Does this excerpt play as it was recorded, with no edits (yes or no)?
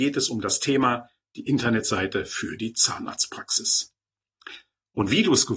yes